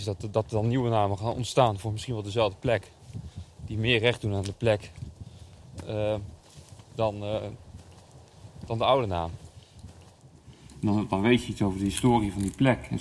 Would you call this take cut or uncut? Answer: uncut